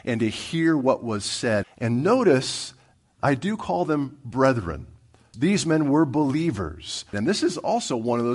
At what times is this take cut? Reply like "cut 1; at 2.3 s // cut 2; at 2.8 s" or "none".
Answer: cut 1; at 1.6 s // cut 2; at 5.3 s // cut 3; at 7.1 s